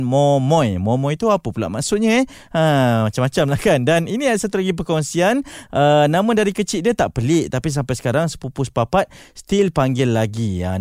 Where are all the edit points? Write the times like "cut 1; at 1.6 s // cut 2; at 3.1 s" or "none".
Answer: none